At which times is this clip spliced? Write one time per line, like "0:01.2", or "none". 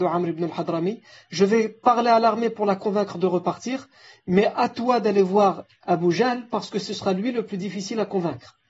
none